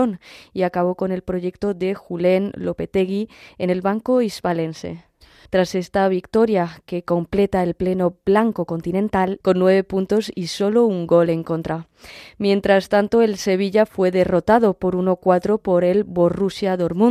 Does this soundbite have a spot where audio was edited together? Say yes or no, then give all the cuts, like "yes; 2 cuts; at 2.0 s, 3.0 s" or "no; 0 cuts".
yes; 2 cuts; at 5.5 s, 9.4 s